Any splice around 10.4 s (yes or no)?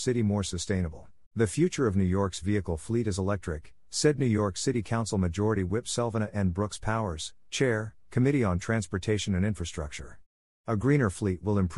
no